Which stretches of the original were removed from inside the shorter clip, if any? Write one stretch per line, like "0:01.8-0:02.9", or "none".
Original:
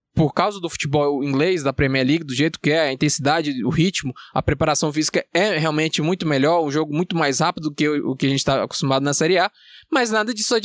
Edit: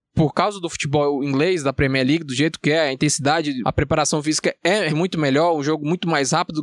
0:03.6-0:04.3
0:05.6-0:06.0